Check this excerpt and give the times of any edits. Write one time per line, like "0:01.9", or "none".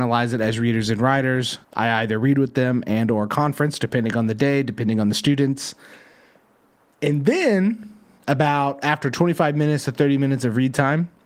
0:01.6